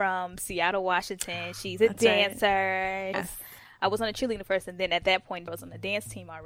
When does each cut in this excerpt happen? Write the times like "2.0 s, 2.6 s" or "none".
3.1 s, 5.5 s